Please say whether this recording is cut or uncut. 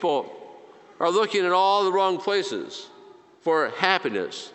uncut